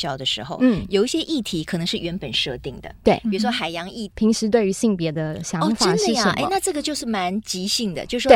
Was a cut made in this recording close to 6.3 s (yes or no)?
no